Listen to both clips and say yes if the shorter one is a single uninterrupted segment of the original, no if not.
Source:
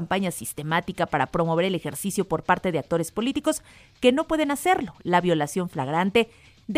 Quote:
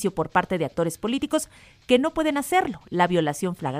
yes